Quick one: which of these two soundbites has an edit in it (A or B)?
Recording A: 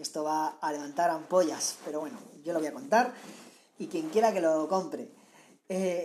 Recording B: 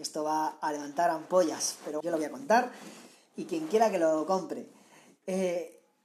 B